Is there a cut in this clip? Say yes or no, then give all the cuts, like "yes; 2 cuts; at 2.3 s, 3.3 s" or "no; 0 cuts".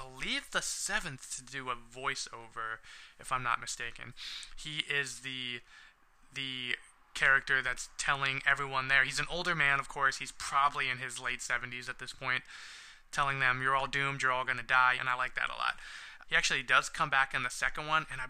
yes; 2 cuts; at 15.0 s, 16.2 s